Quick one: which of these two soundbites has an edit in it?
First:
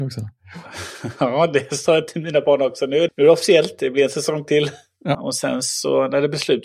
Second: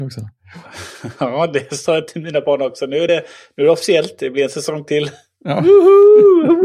first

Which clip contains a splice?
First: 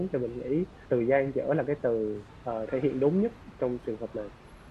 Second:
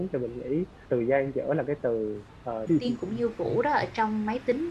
second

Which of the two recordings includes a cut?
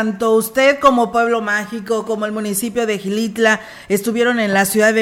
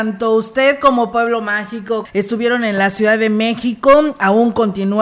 second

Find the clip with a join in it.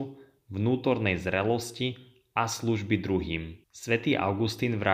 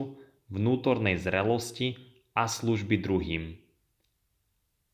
first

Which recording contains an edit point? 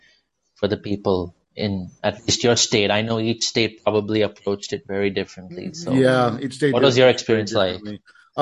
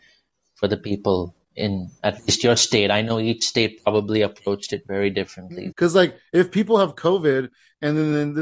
second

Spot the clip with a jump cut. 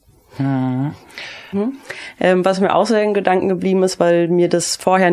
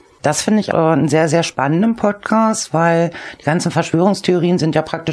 first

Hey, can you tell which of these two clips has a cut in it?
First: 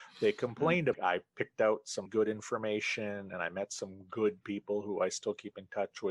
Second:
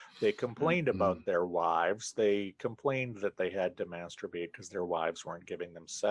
first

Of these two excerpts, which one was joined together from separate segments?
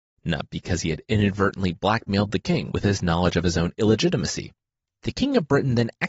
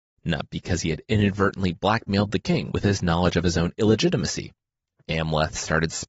second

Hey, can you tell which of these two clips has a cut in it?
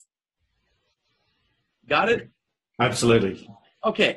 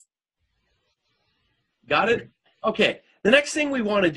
second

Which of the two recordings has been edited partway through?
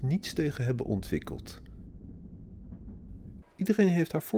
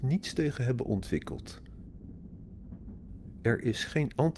first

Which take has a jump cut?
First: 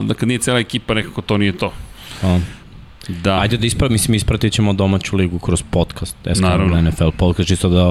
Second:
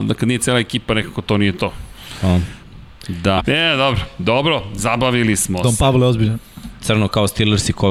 second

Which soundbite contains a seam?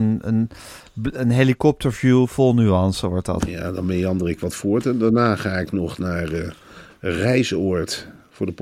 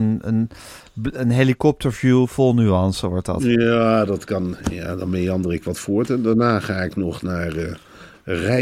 first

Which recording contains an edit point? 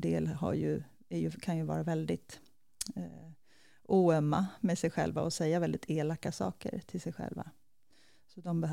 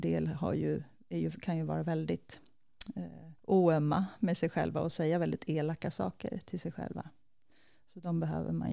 second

